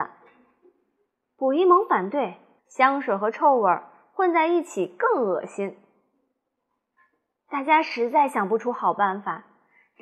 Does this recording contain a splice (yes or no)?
yes